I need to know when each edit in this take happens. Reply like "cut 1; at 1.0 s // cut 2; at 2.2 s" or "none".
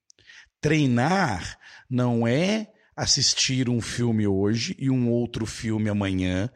none